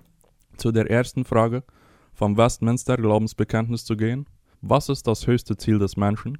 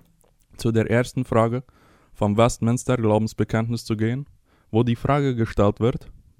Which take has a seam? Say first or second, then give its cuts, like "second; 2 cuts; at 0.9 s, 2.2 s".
first; 1 cut; at 4.5 s